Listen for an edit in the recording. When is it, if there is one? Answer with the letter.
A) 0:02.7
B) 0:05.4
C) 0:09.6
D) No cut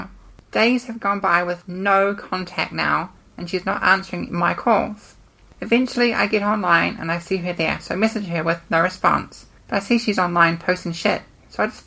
C